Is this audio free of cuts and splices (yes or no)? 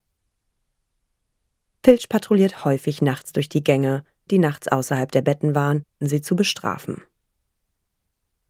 no